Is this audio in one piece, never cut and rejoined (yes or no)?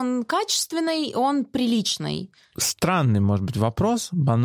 yes